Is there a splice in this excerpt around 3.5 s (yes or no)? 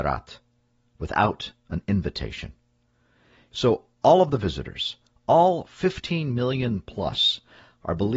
yes